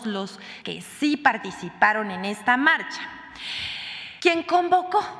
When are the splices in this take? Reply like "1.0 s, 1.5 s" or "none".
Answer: none